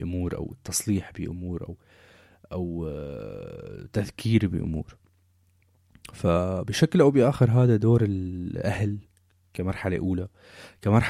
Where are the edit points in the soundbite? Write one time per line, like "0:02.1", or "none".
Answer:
none

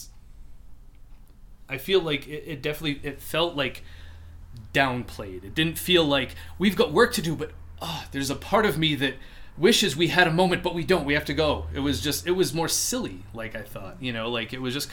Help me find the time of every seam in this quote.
none

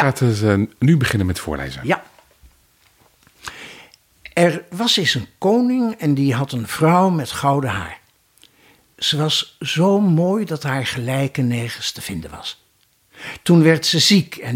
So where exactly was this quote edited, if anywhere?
none

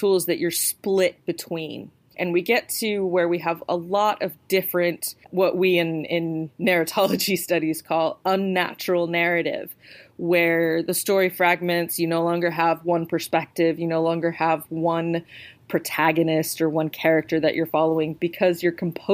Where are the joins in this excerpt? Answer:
0:02.1
0:05.2

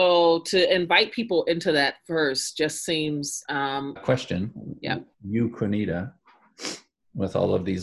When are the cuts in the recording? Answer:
0:04.0
0:05.1

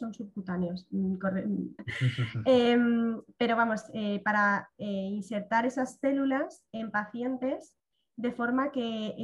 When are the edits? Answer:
0:01.8

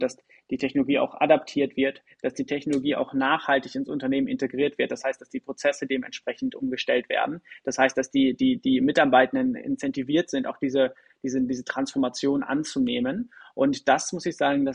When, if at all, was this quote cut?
none

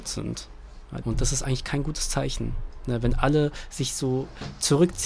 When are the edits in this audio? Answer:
0:01.0

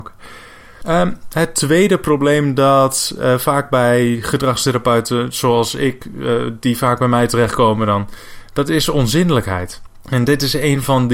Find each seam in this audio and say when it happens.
none

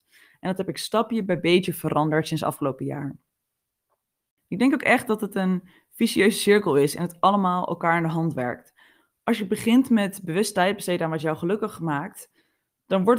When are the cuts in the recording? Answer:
none

